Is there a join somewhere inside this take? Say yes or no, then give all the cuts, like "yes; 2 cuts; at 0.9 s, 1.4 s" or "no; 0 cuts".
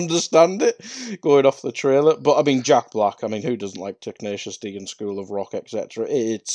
no; 0 cuts